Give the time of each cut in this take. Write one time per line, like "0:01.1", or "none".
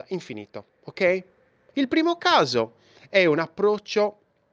0:01.7